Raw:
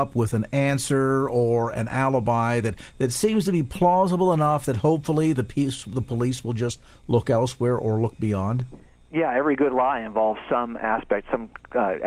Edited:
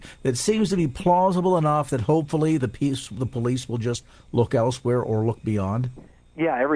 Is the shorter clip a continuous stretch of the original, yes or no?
yes